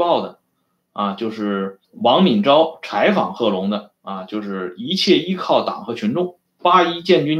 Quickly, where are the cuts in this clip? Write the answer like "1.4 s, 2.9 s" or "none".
1.8 s